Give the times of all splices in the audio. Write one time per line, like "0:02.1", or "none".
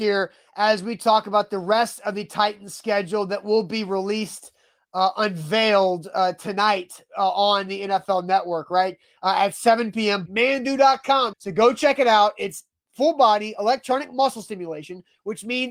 0:10.3
0:11.3